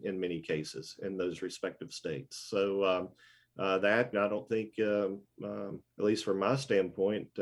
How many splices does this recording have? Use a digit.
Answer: 2